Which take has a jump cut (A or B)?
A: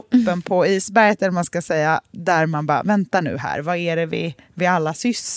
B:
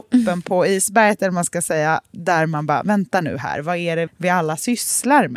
B